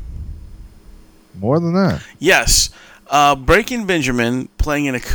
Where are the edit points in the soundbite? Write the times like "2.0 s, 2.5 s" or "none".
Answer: none